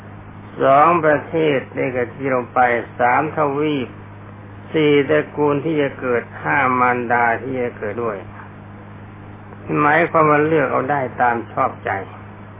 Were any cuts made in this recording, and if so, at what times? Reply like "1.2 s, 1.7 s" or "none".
8.0 s